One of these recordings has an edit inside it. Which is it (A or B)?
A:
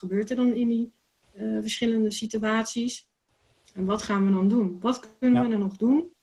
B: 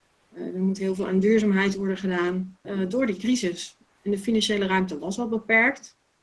B